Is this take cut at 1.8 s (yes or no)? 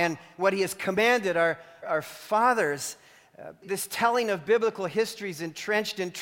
yes